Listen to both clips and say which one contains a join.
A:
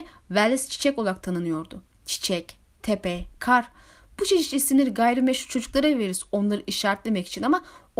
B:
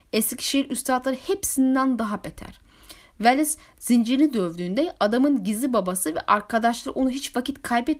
A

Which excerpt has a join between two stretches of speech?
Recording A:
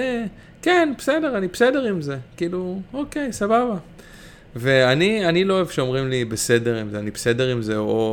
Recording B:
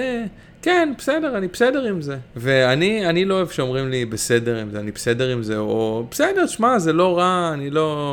B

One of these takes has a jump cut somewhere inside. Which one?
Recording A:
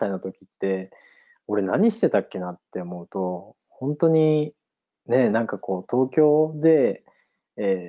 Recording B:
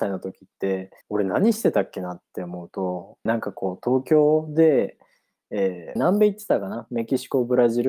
B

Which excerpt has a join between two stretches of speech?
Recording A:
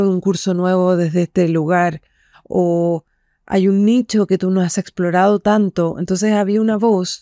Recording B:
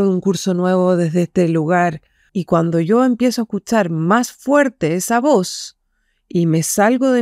B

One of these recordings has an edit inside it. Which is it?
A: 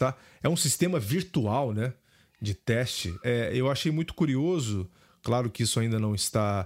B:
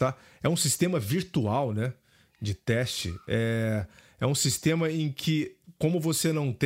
A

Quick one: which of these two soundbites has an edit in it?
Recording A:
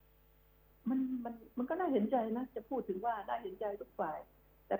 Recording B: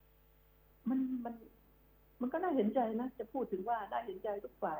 A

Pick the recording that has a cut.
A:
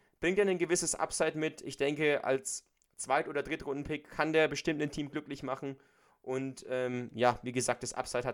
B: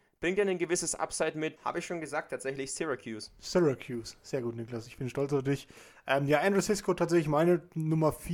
B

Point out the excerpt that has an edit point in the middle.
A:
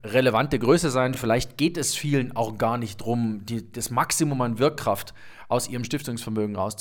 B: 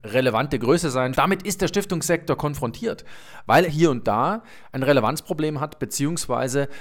B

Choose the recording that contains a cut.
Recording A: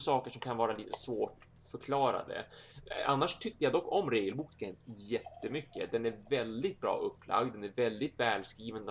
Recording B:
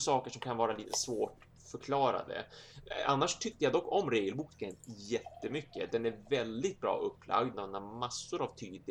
B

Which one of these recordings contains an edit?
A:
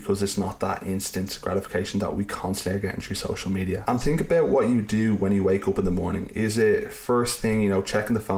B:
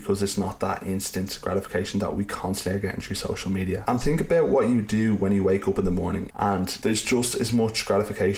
B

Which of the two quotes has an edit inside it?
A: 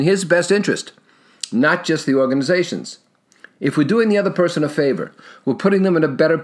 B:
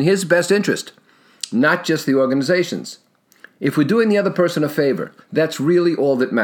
B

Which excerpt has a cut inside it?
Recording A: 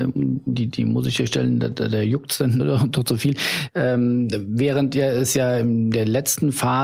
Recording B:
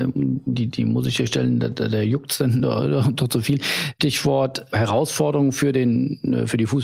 A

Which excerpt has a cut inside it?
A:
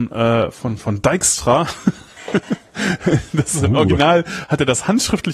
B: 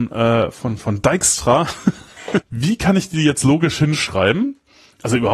B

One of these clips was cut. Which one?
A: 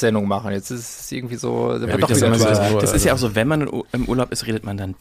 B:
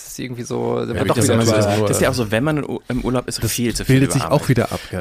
B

